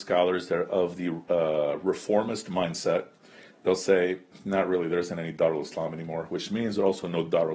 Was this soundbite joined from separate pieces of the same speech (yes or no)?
no